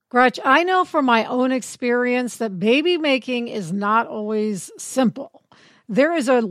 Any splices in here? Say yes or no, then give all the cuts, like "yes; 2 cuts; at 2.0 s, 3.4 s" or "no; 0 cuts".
no; 0 cuts